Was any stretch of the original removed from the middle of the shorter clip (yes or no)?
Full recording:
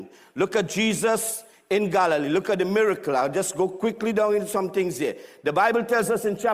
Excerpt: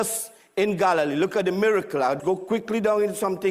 yes